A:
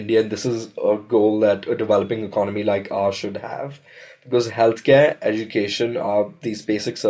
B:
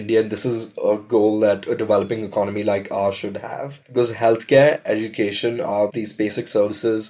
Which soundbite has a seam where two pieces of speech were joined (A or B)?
B